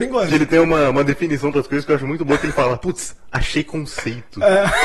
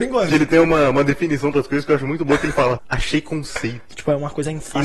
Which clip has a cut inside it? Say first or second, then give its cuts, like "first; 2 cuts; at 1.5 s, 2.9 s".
second; 2 cuts; at 2.8 s, 3.9 s